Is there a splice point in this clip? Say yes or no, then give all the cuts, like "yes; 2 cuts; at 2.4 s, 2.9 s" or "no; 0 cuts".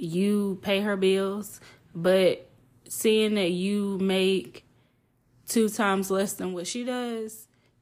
no; 0 cuts